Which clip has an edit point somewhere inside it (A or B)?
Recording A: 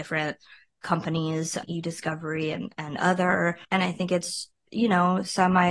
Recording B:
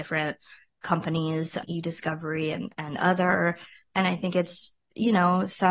A